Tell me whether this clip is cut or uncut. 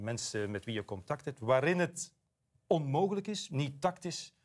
cut